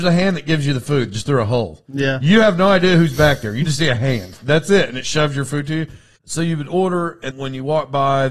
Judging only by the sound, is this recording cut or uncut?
cut